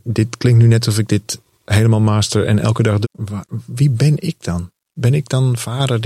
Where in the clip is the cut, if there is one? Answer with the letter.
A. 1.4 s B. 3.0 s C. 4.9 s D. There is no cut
B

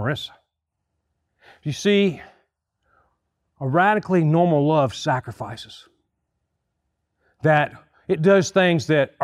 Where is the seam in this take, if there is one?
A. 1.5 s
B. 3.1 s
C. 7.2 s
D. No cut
D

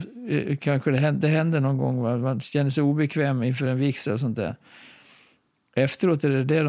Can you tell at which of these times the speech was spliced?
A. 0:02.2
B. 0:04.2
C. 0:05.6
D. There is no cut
D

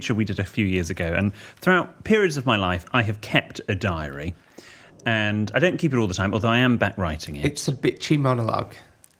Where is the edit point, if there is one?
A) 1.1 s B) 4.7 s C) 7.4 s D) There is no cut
D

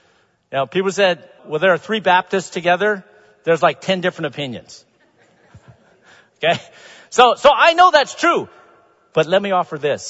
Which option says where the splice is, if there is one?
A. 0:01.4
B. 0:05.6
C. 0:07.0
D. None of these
A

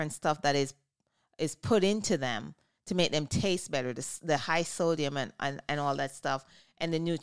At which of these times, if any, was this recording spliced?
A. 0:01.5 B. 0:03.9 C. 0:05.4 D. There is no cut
D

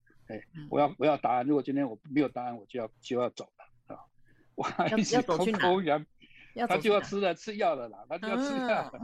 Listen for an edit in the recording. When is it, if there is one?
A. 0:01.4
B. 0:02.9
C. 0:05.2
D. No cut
B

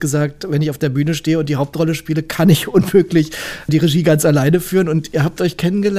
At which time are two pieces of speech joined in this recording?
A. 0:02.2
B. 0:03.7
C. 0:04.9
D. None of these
B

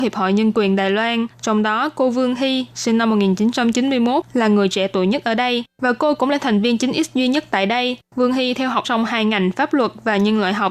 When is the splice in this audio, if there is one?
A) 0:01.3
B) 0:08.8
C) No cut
B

